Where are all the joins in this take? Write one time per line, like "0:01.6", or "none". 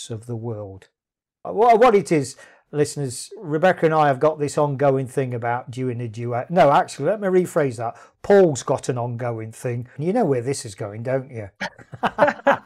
0:01.4
0:10.0